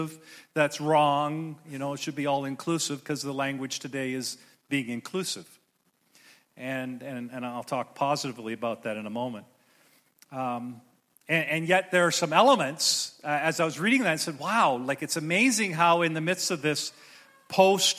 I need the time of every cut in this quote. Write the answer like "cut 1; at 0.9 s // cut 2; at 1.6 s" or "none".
none